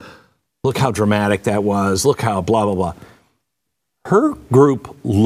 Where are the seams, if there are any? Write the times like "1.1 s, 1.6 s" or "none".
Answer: none